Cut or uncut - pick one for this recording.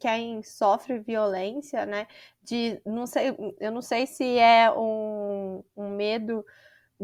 uncut